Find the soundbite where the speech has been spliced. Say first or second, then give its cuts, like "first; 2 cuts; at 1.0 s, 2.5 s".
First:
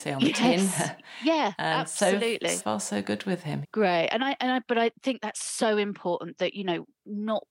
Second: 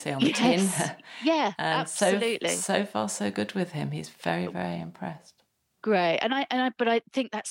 first; 2 cuts; at 2.6 s, 3.6 s